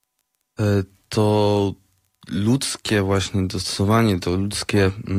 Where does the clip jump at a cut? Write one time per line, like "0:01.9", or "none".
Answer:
none